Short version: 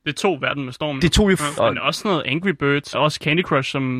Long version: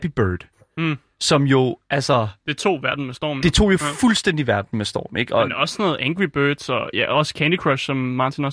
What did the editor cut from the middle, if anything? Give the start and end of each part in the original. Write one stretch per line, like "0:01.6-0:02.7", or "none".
0:04.0-0:05.3
0:06.7-0:07.1